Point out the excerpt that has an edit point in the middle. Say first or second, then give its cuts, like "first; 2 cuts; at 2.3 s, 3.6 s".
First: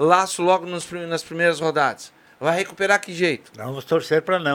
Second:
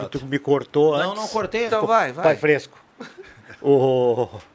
second; 1 cut; at 1.7 s